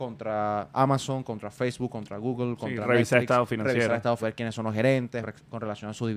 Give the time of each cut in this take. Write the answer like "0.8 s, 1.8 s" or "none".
4.2 s, 5.2 s

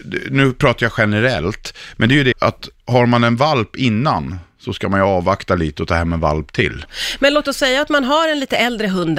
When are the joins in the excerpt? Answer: 2.3 s, 6.9 s

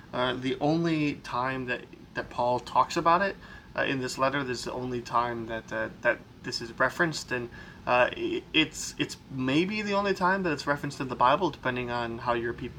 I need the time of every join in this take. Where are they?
none

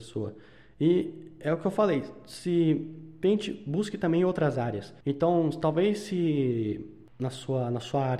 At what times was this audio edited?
5.0 s

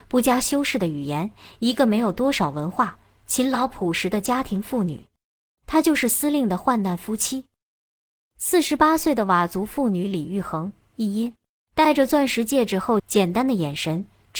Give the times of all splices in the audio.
11.6 s, 13.0 s

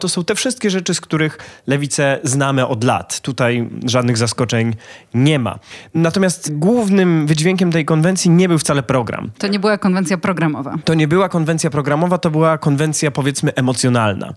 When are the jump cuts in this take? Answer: none

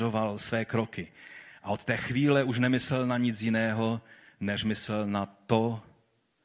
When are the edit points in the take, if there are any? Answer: none

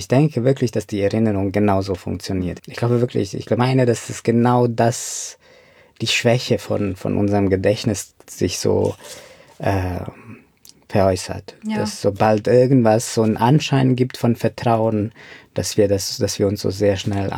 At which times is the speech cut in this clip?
2.6 s

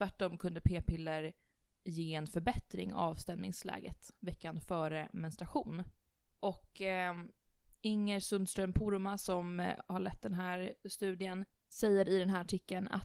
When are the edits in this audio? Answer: none

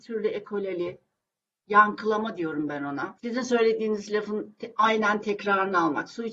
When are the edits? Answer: none

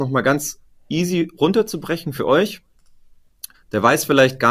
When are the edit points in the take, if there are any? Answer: 3.5 s

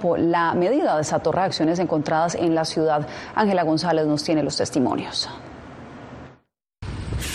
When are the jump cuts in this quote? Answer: none

